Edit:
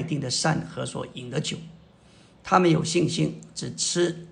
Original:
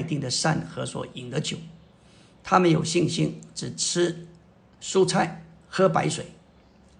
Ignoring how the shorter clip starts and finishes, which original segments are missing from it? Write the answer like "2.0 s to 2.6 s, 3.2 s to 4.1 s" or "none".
none